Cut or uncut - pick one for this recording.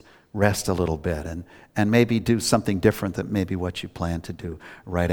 uncut